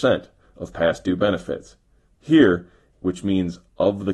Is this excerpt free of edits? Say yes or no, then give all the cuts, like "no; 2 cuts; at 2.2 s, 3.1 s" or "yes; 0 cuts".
no; 1 cut; at 2.9 s